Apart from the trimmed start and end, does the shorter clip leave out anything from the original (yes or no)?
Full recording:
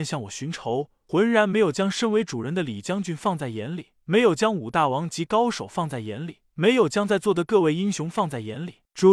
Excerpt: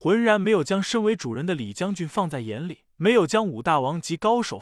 no